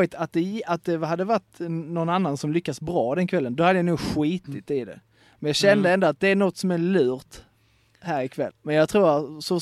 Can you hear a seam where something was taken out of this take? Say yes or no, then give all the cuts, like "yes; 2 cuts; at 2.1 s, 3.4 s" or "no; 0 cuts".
yes; 1 cut; at 8.5 s